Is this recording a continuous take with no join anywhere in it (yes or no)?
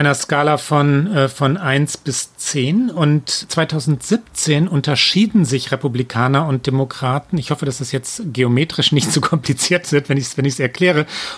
yes